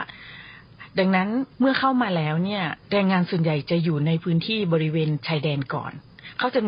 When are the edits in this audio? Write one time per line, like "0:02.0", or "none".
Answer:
0:01.5
0:02.8